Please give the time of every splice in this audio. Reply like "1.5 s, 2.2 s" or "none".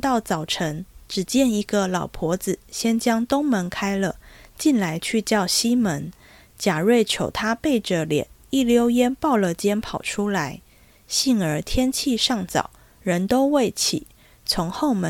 none